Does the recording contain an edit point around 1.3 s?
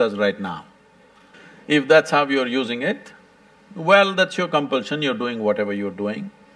yes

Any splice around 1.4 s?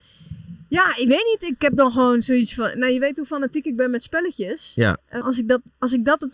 no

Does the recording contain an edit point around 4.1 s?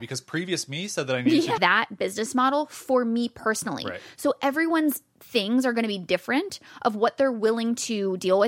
no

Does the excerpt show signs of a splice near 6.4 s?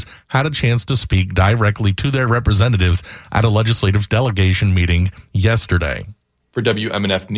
yes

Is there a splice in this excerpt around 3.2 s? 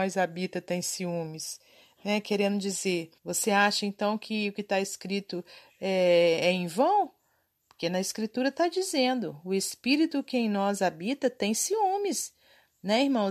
yes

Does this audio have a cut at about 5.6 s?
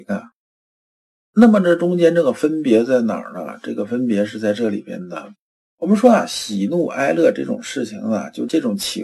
yes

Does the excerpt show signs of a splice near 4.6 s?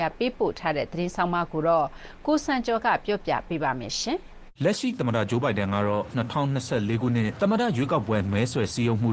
yes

